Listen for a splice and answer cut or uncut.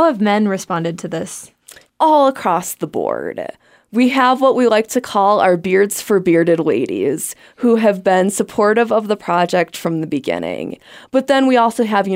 uncut